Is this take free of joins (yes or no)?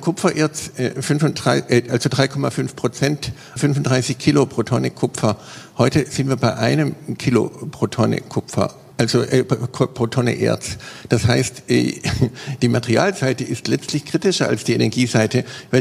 no